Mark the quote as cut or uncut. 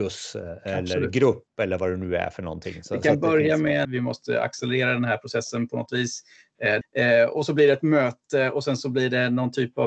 cut